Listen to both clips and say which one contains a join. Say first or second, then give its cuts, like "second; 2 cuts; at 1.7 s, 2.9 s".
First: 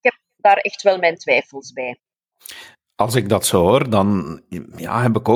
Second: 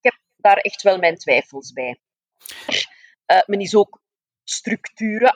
second; 1 cut; at 2.7 s